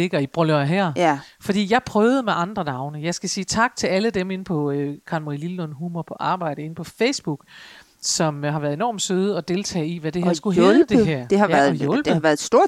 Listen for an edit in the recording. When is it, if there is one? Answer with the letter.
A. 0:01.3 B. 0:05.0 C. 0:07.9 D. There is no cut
D